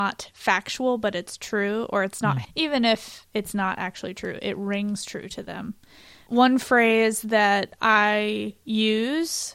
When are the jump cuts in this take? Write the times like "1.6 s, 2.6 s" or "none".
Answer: 2.4 s